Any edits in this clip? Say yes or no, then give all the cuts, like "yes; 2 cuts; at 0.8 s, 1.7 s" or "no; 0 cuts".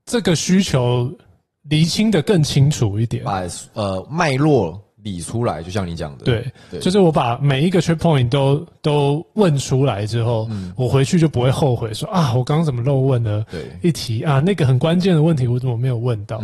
no; 0 cuts